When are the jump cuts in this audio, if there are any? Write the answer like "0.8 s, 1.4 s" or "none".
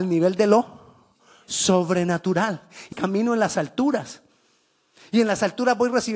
2.9 s